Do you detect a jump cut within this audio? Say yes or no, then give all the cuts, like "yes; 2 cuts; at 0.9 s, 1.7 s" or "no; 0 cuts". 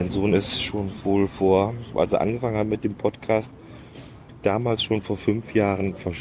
yes; 1 cut; at 1.9 s